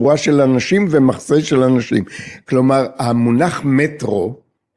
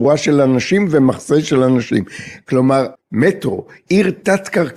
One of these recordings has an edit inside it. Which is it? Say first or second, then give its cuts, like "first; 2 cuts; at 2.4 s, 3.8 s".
second; 1 cut; at 2.9 s